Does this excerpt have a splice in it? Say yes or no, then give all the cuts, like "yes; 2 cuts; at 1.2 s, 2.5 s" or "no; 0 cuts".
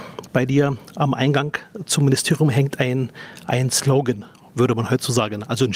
no; 0 cuts